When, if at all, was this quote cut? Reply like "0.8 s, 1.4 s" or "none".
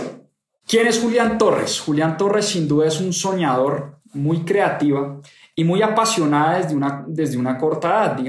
4.0 s